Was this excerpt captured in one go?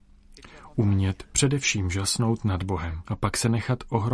no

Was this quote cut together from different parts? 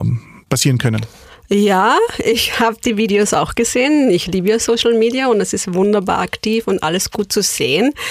no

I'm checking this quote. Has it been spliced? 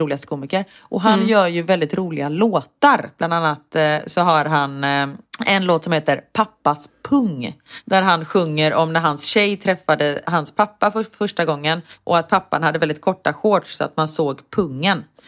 no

